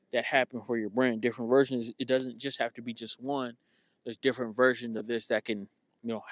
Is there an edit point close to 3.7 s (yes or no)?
no